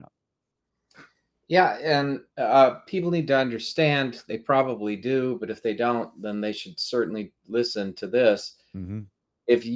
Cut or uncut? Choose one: uncut